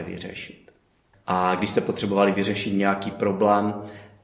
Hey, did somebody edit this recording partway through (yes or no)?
yes